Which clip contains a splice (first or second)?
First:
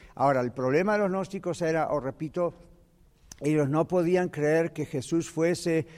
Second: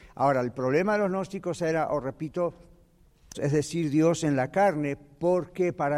second